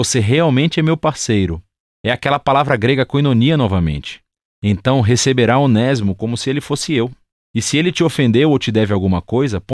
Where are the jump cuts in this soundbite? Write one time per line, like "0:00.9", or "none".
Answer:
none

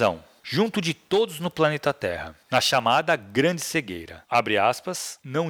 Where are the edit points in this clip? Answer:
0:04.3

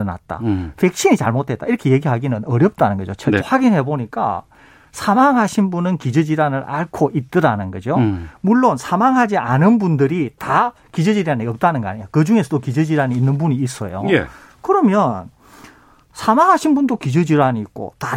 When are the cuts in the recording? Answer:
0:03.4

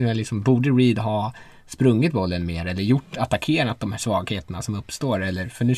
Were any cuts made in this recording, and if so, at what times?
none

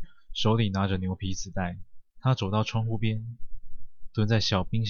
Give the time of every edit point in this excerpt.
0:02.1

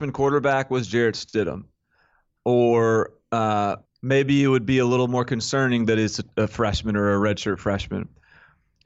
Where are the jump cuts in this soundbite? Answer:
0:03.8

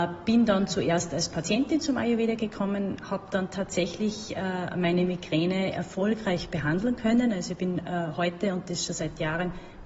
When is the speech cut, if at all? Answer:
none

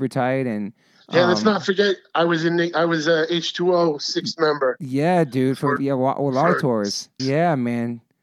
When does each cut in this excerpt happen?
0:05.8
0:07.2

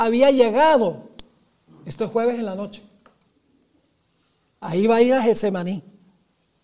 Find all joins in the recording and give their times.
none

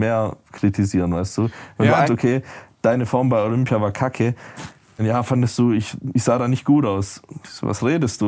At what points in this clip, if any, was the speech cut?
0:02.1
0:05.0

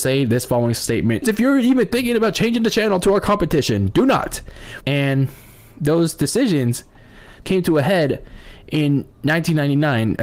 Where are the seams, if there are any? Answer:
0:01.2
0:04.8
0:07.4

